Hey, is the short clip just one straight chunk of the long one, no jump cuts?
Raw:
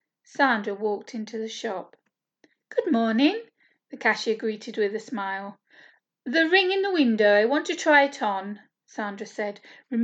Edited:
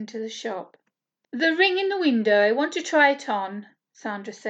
no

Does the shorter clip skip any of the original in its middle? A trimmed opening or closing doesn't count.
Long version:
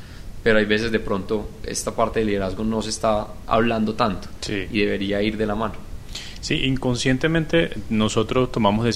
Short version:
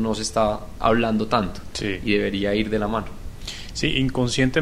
no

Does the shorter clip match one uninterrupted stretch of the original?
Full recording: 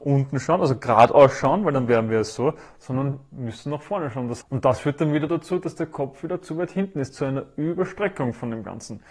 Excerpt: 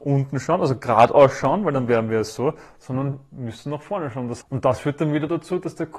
yes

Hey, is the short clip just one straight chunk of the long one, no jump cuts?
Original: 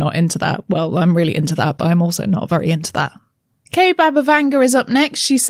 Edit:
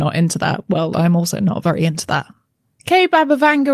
no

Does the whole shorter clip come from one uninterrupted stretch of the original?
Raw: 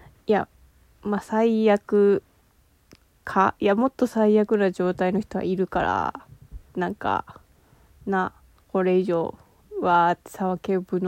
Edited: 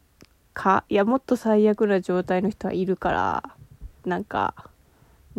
yes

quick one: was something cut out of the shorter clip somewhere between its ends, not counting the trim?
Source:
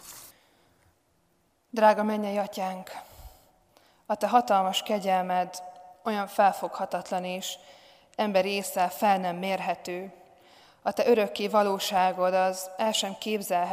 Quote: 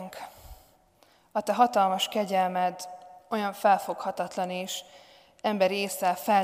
no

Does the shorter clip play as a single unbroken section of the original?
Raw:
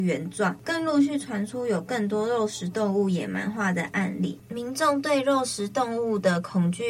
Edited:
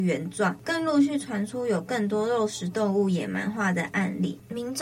yes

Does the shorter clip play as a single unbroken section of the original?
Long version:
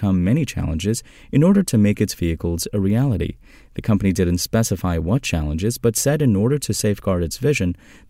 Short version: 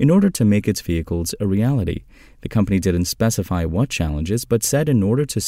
yes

